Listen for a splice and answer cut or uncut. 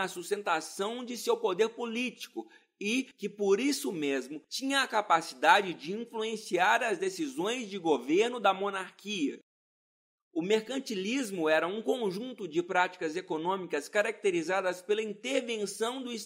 cut